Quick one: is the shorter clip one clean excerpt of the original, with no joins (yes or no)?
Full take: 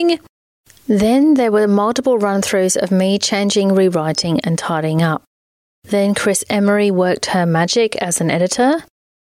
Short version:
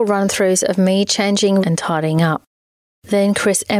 no